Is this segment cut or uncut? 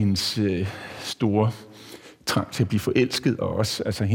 uncut